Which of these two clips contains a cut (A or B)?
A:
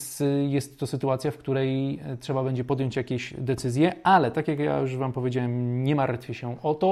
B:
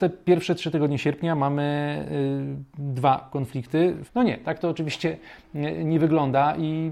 B